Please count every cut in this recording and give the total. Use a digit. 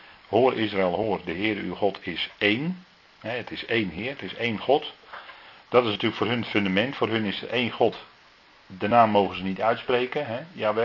0